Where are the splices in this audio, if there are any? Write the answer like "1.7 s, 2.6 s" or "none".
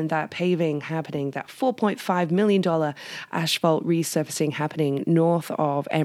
none